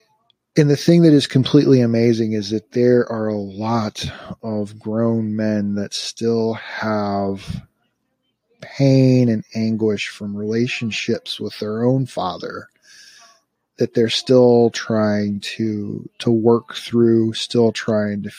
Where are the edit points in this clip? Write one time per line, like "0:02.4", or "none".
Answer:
none